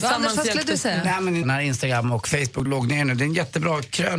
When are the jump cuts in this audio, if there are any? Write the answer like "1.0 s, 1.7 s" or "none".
1.4 s, 2.7 s